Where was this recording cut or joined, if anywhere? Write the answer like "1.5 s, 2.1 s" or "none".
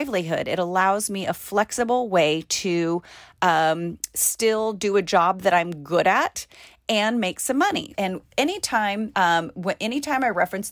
7.9 s, 9.1 s